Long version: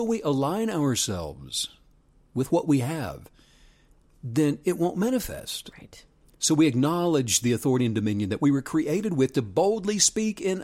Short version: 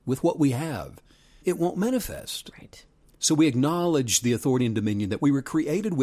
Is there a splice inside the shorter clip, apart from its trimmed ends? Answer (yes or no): yes